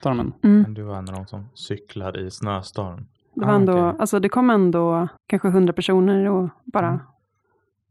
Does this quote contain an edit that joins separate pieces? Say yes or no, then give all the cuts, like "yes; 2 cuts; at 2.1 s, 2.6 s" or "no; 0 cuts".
yes; 2 cuts; at 3.3 s, 5.2 s